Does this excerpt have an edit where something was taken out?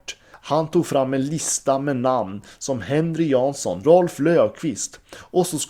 yes; 1 cut; at 3.8 s

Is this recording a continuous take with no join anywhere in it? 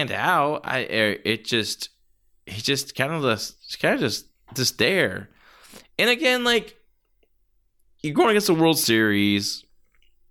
yes; 0 cuts

